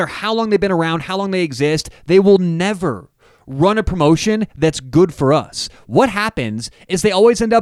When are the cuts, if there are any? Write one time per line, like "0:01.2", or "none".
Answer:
none

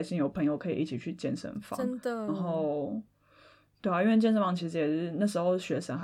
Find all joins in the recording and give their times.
none

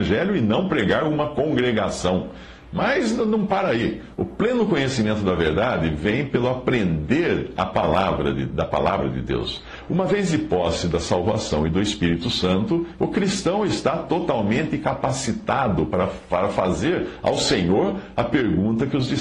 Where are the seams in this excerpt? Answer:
0:13.0

